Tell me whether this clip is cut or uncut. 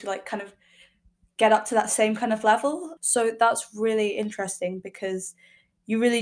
cut